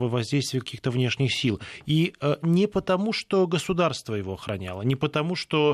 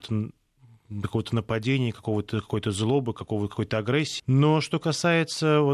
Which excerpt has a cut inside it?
second; 1 cut; at 4.2 s

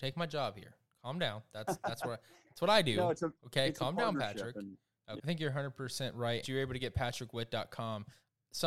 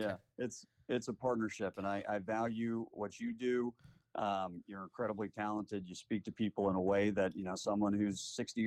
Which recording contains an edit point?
first; 2 cuts; at 5.2 s, 6.4 s

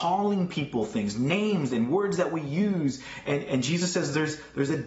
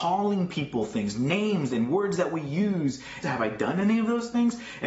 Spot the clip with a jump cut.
second; 1 cut; at 3.2 s

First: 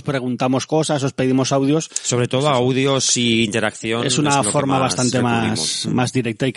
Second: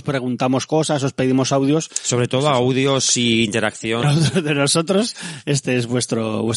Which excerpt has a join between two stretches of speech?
second; 1 cut; at 4.0 s

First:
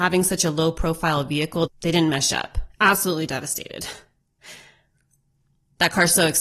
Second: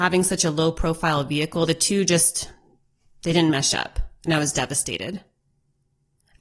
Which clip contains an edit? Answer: first; 2 cuts; at 1.7 s, 2.7 s

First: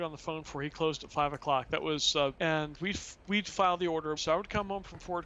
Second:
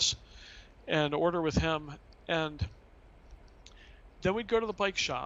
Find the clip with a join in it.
first; 2 cuts; at 2.4 s, 4.2 s

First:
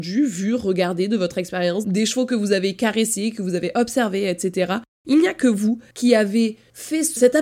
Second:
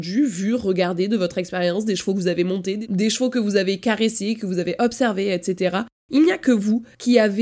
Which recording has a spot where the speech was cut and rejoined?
first; 1 cut; at 1.8 s

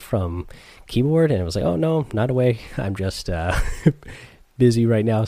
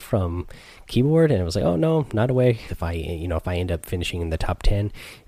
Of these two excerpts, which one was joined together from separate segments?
second; 1 cut; at 2.7 s

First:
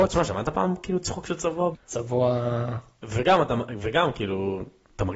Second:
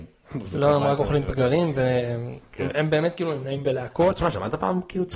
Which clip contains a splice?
first; 1 cut; at 1.7 s

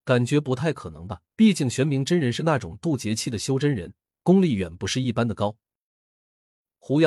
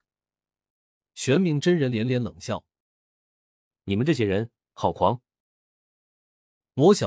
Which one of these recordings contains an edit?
first; 1 cut; at 1.3 s

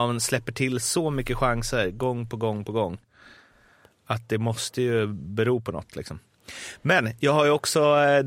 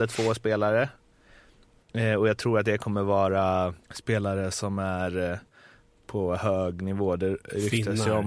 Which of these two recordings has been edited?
second; 1 cut; at 3.8 s

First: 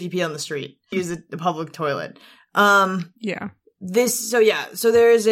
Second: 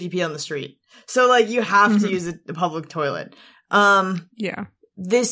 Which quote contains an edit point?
first; 1 cut; at 0.9 s

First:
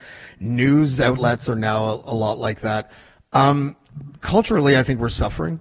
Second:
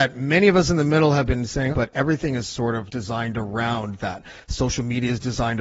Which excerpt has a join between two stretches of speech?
second; 2 cuts; at 1.7 s, 2.9 s

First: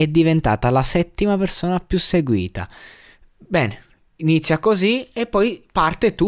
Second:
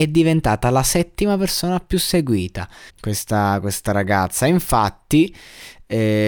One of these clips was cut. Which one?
second; 1 cut; at 2.9 s

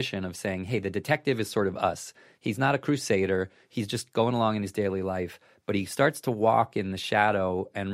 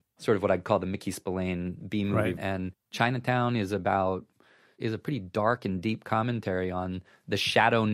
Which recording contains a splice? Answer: second; 1 cut; at 2.4 s

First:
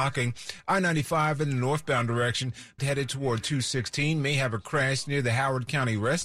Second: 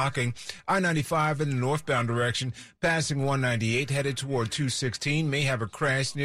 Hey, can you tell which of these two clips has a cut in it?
first; 1 cut; at 2.8 s

